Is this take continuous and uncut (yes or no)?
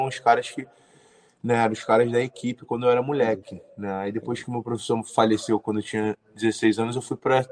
yes